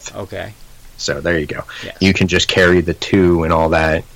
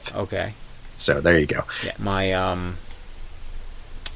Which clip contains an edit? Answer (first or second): second